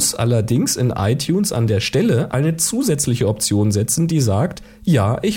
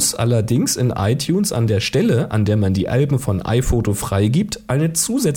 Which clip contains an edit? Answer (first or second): first